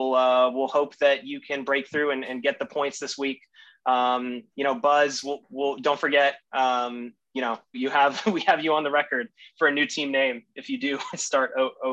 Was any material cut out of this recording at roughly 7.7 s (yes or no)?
yes